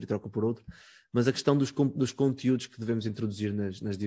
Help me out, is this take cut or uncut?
uncut